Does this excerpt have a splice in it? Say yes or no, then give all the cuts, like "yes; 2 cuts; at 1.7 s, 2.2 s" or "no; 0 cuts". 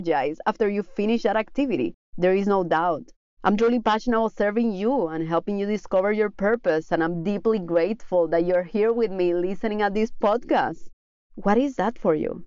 no; 0 cuts